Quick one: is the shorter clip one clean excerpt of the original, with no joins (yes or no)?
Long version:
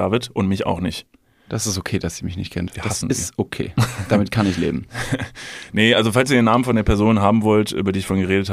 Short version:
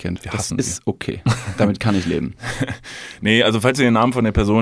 yes